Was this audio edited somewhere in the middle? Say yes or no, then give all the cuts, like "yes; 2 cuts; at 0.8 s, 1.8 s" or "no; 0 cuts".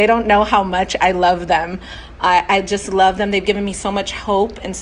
no; 0 cuts